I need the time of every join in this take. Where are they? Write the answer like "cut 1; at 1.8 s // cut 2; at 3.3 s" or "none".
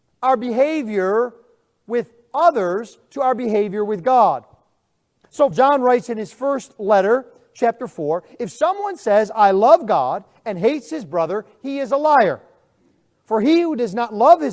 cut 1; at 5.5 s